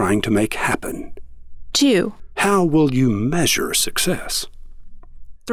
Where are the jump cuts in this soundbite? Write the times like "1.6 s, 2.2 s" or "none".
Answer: none